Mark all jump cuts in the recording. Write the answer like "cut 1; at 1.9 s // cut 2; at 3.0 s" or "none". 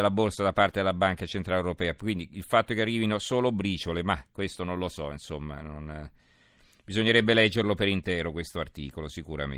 none